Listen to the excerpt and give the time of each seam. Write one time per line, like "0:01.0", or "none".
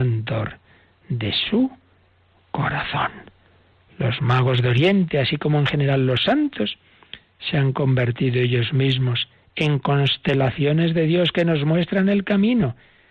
none